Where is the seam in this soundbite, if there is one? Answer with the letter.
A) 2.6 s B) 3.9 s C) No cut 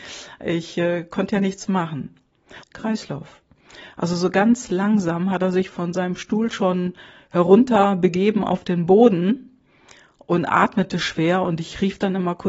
A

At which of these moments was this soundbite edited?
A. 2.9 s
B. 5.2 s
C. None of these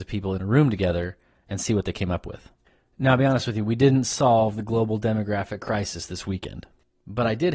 C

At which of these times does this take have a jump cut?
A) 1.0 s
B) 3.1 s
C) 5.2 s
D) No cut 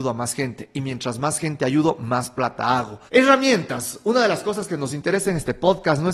B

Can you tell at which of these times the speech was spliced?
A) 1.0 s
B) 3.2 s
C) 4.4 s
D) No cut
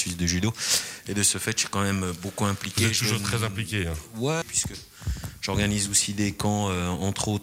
C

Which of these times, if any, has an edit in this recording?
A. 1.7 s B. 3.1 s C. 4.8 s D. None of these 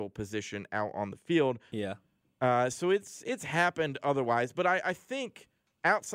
A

